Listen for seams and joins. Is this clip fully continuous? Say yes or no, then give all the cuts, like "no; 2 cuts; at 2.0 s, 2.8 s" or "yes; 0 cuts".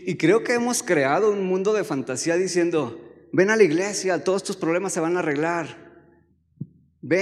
yes; 0 cuts